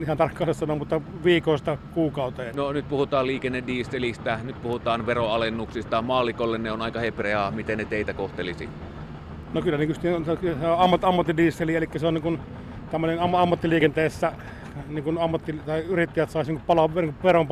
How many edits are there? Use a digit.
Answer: 1